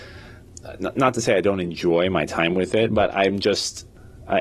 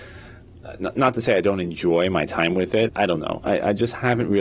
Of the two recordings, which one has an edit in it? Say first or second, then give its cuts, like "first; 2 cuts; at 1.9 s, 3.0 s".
second; 1 cut; at 2.9 s